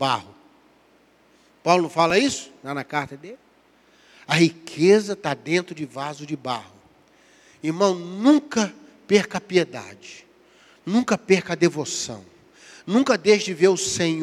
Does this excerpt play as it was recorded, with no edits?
yes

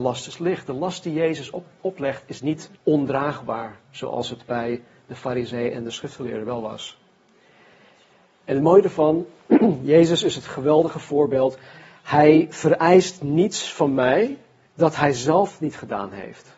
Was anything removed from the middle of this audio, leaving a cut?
yes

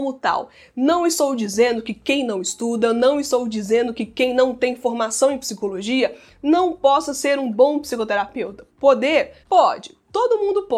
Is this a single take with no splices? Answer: no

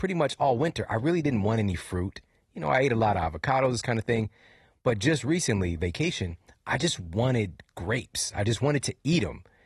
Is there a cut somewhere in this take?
yes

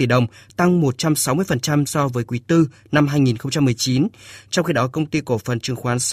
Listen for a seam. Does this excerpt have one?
no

